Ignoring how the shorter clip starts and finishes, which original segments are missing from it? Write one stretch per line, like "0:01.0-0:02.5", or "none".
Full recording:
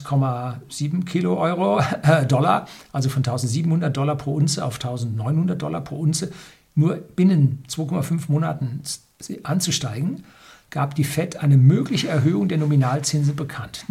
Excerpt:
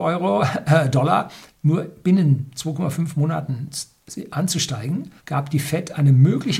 0:02.9-0:06.6
0:10.3-0:10.6

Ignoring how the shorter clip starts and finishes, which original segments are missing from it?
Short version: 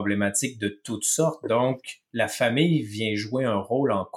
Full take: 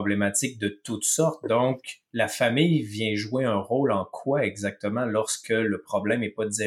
none

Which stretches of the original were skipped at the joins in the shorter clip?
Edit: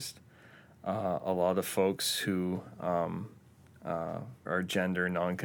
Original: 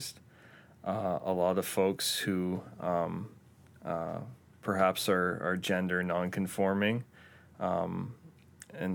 0:04.4-0:05.4

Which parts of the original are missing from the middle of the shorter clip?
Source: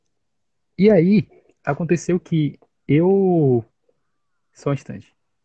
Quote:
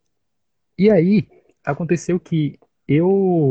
none

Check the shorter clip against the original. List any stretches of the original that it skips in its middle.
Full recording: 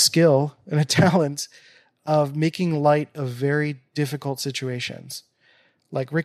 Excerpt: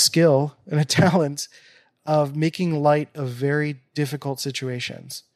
none

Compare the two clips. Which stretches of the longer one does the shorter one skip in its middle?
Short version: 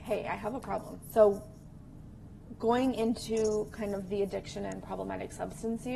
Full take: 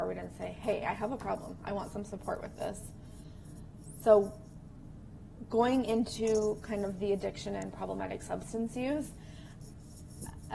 0:01.6-0:03.9

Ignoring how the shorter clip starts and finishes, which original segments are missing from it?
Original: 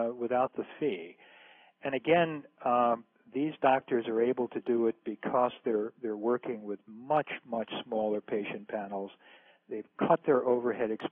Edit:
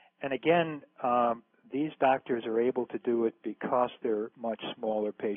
0:05.9-0:07.4

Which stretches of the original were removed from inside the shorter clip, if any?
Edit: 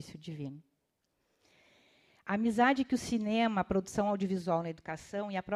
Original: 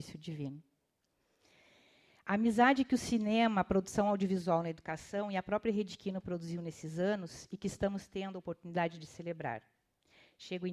none

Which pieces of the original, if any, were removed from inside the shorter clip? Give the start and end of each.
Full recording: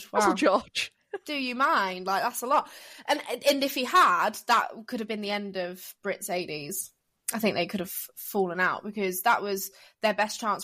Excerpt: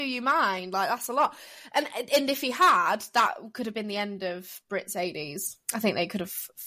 0:07.0-0:07.2

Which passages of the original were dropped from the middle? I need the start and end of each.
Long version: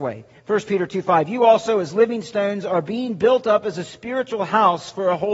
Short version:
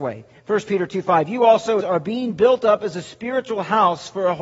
0:01.8-0:02.6

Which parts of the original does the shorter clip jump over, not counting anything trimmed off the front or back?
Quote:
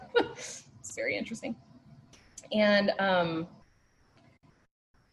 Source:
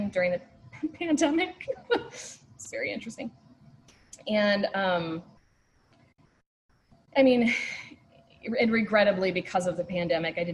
none

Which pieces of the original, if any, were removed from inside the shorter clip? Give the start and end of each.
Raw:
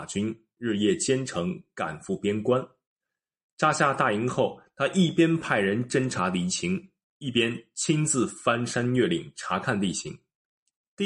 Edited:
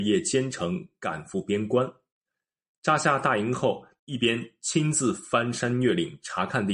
0:04.7-0:07.1

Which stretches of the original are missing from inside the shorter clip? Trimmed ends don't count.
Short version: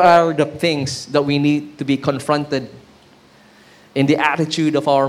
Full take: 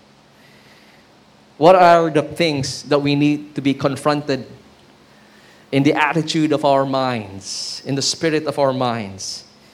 none

